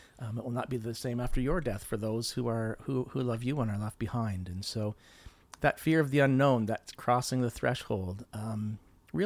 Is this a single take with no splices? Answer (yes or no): yes